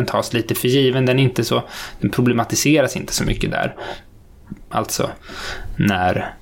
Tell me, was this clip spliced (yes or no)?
yes